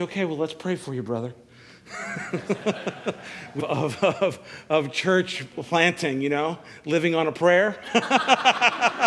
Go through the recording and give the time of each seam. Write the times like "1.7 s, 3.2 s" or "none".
3.6 s

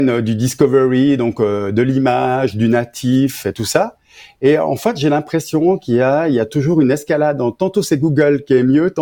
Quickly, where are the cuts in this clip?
none

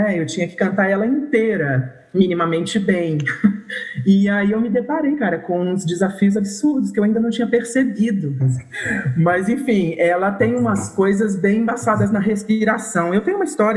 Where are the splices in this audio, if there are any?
8.4 s

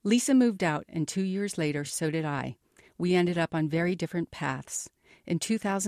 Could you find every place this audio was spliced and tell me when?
none

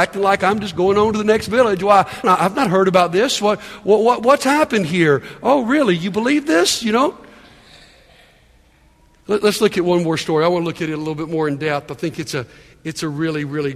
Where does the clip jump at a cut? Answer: 2.2 s

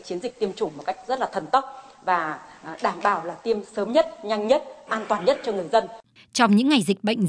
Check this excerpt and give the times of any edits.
6.2 s

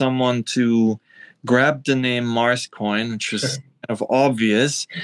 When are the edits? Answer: none

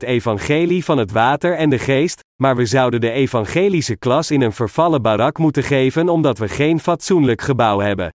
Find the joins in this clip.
none

